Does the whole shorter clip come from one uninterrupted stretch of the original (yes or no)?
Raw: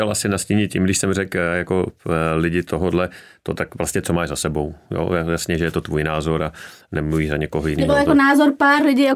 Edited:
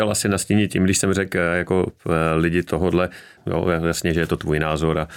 no